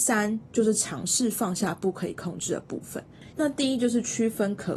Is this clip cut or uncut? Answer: cut